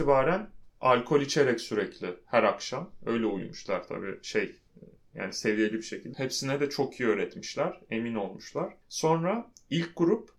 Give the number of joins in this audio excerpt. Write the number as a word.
one